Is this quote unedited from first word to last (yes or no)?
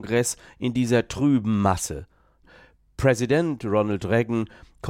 no